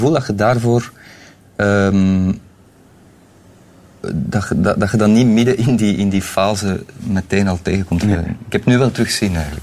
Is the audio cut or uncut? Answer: cut